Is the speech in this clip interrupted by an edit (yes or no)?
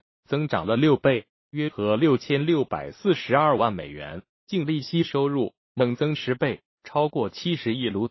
yes